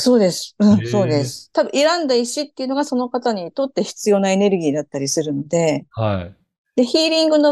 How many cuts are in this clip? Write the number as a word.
zero